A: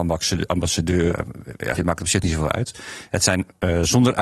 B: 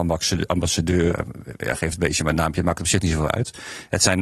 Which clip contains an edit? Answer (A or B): A